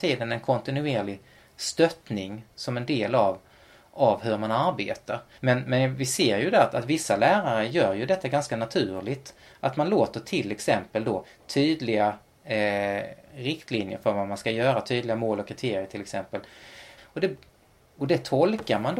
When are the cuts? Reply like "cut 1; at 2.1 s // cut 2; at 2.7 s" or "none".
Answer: cut 1; at 5.4 s // cut 2; at 17.0 s